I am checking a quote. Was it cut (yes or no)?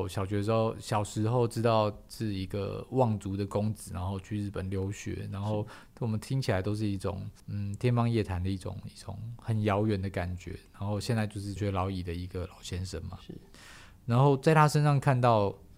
yes